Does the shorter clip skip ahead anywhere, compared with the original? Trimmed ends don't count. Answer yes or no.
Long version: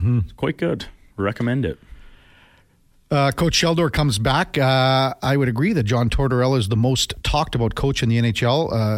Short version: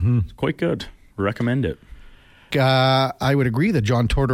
yes